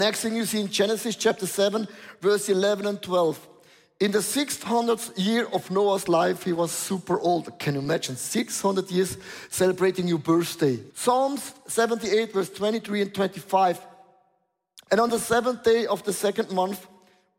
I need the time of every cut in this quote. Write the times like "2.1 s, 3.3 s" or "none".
10.9 s, 14.9 s